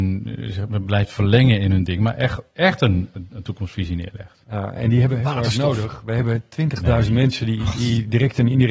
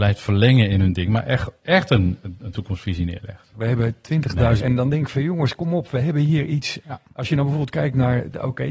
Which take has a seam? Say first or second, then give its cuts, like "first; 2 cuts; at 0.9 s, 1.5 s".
second; 3 cuts; at 3.5 s, 4.6 s, 6.8 s